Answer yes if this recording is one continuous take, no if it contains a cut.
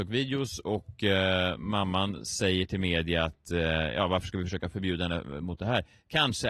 yes